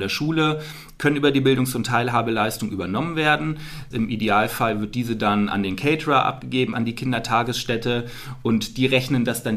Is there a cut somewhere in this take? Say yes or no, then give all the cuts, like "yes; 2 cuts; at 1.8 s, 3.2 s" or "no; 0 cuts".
yes; 2 cuts; at 3.9 s, 6.7 s